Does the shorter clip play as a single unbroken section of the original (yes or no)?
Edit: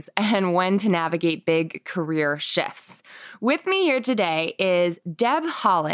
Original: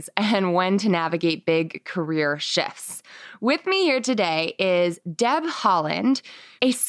yes